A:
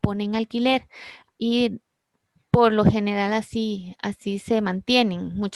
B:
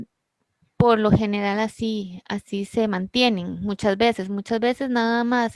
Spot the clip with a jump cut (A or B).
A